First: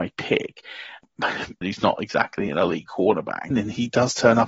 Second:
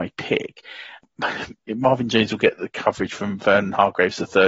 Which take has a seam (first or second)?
first